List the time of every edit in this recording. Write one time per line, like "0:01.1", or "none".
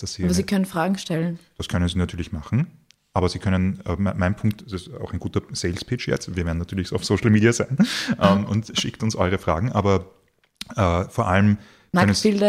none